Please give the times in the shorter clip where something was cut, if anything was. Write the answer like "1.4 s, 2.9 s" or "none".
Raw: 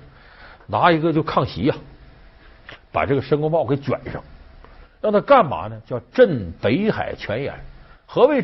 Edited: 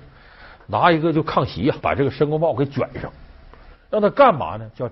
1.8 s